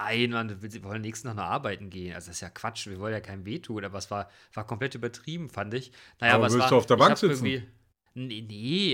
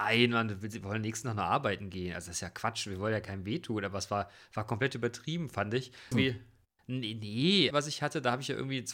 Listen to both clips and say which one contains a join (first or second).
second